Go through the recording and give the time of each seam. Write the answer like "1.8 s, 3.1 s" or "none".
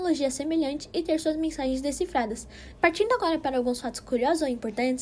2.7 s